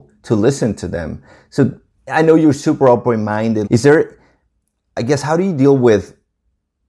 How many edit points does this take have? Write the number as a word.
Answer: one